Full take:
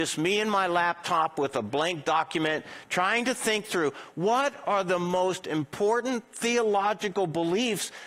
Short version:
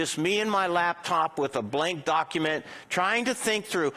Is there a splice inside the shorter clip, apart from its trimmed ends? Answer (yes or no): no